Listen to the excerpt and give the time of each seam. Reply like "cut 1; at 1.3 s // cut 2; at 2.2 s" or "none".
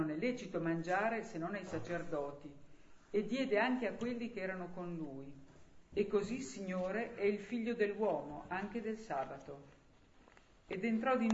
cut 1; at 5.9 s